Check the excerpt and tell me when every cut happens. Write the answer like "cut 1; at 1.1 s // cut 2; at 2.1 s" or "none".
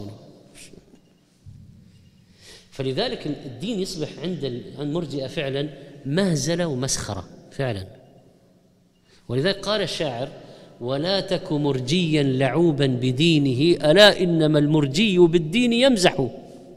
none